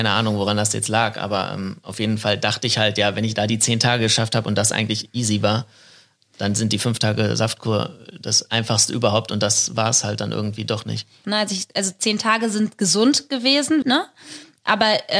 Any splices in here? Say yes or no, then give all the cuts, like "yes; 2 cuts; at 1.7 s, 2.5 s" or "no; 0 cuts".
yes; 2 cuts; at 11.2 s, 13.8 s